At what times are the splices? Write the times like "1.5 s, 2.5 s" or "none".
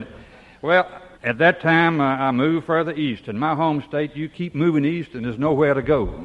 1.1 s